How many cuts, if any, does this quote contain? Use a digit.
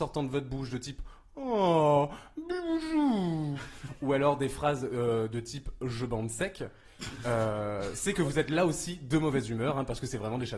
0